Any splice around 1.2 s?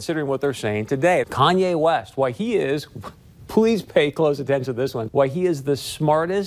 yes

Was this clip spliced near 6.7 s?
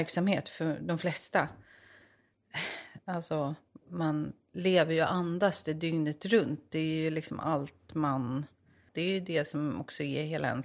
no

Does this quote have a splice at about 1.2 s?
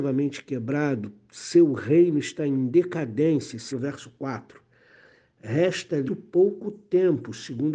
no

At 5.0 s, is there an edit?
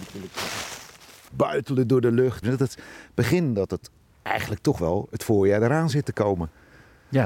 no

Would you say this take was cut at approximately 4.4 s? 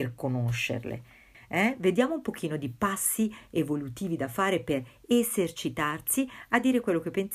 no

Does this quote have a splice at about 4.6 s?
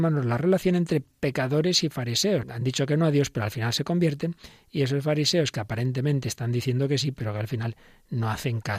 no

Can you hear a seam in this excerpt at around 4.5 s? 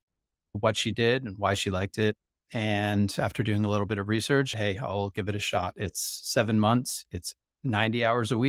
yes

